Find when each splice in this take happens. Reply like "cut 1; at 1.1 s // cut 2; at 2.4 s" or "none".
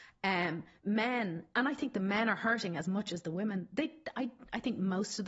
none